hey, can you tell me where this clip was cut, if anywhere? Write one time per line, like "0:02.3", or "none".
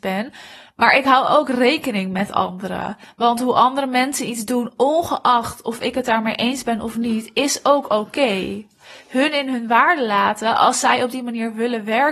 0:03.0